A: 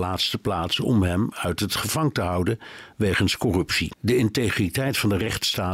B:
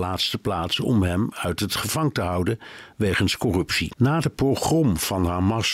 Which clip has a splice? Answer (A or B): B